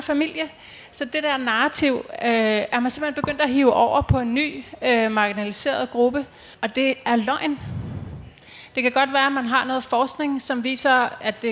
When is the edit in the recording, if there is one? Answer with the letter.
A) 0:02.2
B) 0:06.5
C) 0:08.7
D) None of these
B